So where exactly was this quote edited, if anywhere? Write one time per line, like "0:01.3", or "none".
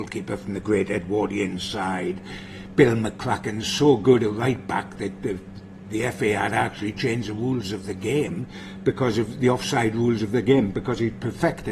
none